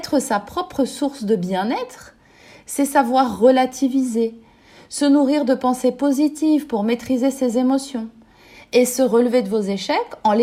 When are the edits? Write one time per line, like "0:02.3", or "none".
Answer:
none